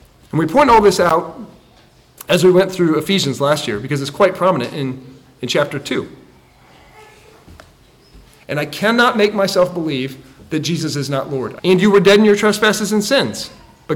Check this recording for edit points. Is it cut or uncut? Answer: cut